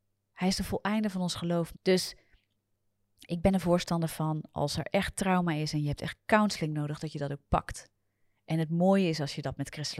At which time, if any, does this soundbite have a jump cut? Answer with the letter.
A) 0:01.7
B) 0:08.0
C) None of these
A